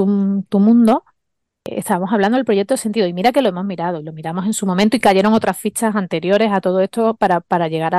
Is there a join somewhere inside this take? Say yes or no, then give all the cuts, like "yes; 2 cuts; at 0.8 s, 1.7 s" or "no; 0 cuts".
no; 0 cuts